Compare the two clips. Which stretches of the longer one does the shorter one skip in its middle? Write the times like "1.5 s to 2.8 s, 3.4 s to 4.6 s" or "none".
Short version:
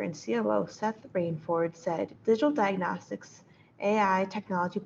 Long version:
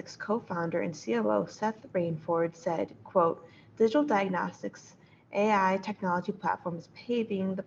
2.9 s to 3.7 s